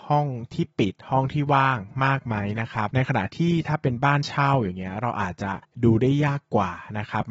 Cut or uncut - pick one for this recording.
uncut